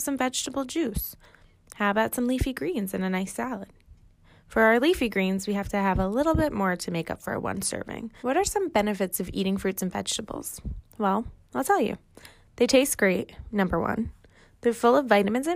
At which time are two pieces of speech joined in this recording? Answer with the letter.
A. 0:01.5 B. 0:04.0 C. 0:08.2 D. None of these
C